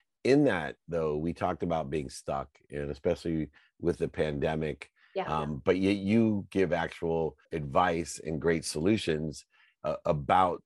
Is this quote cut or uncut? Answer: cut